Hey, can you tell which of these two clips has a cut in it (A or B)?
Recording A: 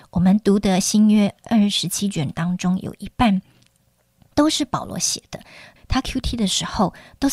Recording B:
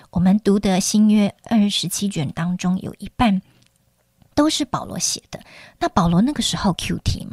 A